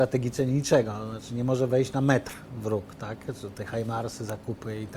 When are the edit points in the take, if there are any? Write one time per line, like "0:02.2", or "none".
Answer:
none